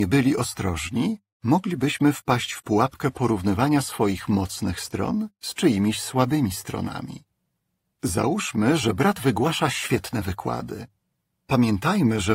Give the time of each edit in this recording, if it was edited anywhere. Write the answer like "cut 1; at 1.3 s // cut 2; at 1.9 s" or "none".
cut 1; at 11.3 s